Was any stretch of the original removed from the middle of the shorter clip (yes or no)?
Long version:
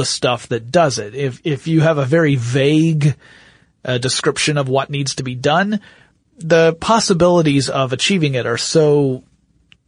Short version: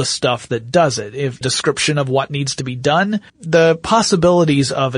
yes